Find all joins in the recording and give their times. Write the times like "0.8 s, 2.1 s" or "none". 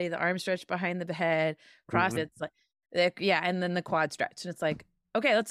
2.2 s